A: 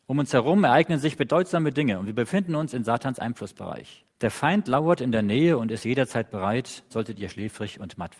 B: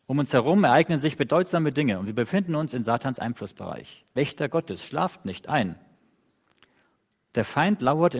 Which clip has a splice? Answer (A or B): A